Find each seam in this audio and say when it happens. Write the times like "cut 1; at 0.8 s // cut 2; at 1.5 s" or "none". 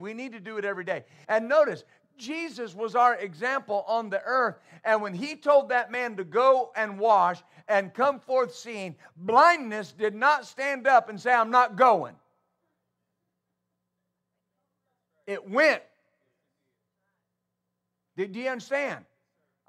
cut 1; at 1.2 s